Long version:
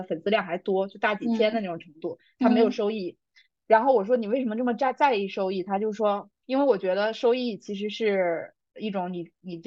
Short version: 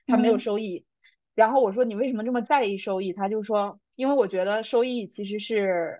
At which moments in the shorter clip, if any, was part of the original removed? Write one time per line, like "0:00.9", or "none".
0:02.4